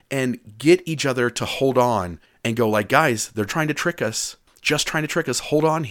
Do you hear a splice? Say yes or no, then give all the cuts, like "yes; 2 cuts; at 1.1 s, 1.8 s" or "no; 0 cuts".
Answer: yes; 1 cut; at 3.5 s